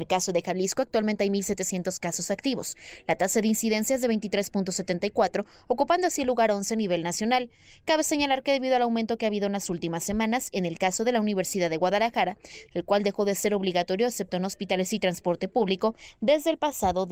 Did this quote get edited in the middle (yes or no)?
yes